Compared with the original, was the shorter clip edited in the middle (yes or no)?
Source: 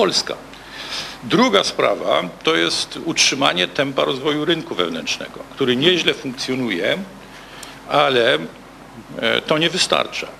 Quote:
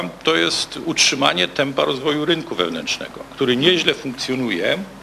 no